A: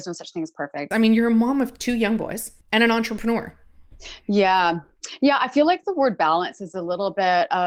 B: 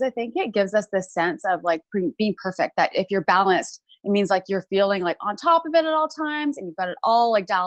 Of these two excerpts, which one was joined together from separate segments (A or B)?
A